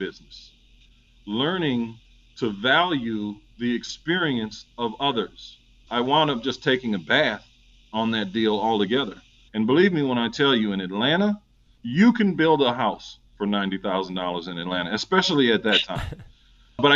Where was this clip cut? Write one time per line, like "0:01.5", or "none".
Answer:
0:05.9
0:09.5